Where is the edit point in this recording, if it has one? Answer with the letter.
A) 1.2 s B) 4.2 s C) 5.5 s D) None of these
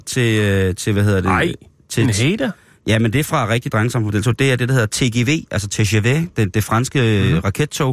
D